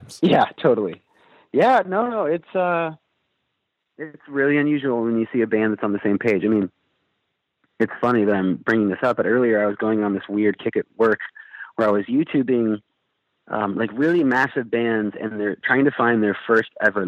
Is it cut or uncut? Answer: uncut